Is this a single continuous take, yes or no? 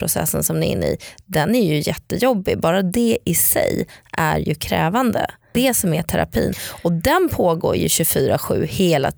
no